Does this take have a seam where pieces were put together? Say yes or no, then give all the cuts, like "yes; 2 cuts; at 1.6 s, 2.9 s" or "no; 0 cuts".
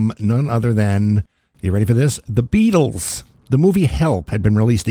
no; 0 cuts